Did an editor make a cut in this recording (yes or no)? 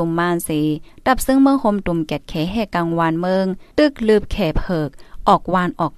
yes